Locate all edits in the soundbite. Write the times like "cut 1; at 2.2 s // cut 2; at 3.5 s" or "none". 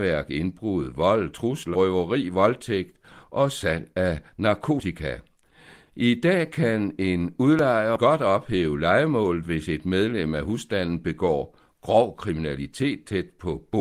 cut 1; at 1.7 s // cut 2; at 5.9 s // cut 3; at 8.0 s